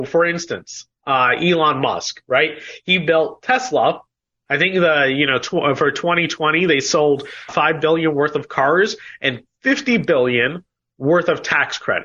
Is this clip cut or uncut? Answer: cut